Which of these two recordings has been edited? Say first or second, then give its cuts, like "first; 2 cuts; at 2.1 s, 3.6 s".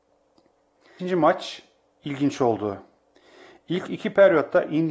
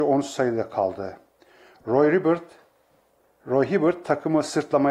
first; 1 cut; at 1.0 s